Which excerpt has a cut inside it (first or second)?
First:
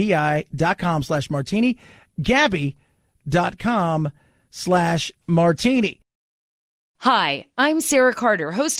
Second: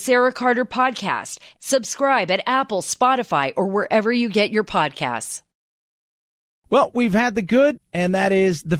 second